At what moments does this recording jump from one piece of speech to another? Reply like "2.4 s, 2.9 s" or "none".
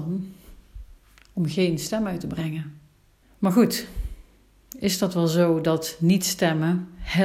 3.2 s